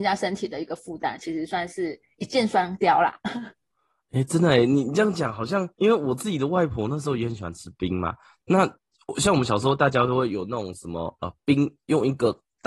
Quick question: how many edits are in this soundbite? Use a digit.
1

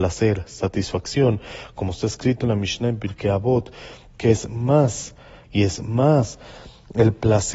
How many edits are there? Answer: 1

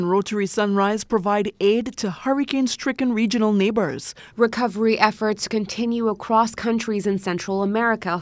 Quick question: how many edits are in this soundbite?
1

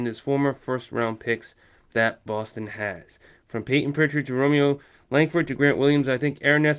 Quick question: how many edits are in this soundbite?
0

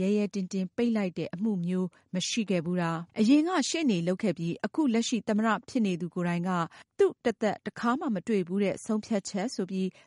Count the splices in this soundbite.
1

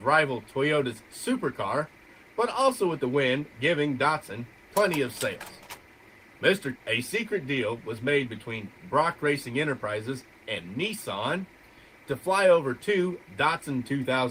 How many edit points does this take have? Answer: 1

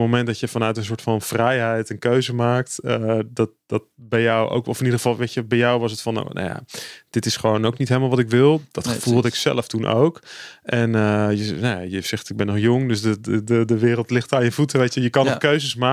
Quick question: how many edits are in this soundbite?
0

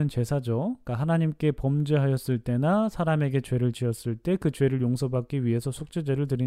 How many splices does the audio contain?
0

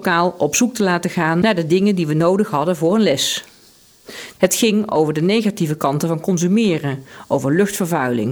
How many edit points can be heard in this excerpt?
1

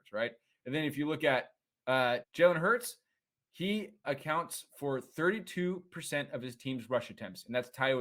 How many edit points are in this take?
2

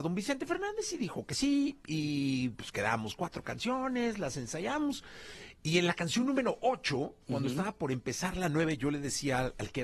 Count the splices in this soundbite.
0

